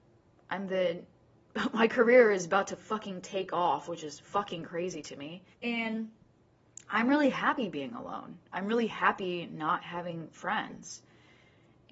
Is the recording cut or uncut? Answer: cut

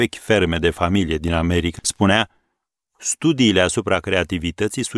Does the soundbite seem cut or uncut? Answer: cut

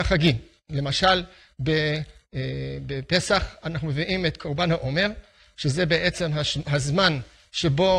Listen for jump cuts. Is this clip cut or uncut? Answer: uncut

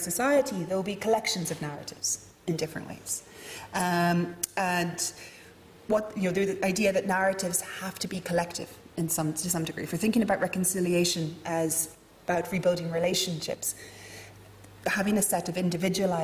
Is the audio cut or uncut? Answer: uncut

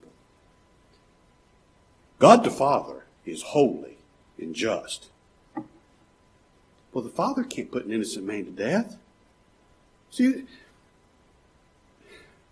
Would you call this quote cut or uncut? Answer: cut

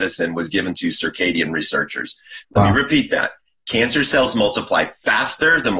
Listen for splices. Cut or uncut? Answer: cut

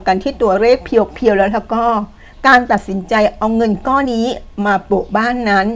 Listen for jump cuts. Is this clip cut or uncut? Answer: cut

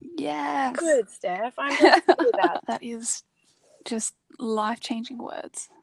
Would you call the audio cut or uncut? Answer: cut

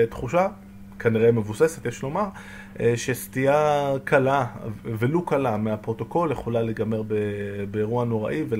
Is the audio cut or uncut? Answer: uncut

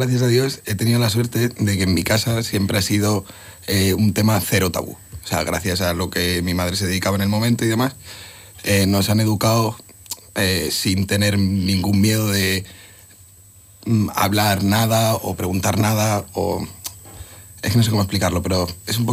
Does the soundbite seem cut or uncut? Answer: uncut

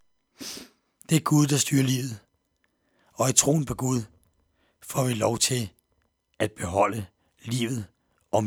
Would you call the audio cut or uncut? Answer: uncut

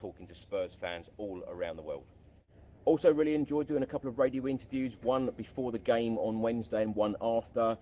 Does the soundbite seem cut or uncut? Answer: uncut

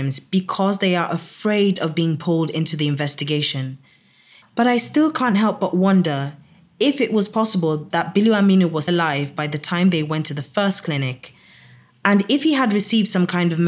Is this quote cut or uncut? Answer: cut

